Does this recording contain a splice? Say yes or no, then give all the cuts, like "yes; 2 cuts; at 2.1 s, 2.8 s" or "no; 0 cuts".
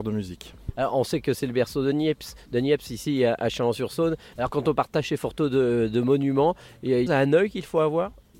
yes; 2 cuts; at 4.3 s, 7.1 s